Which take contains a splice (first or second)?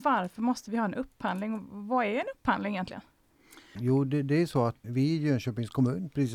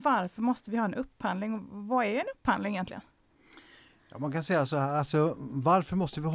first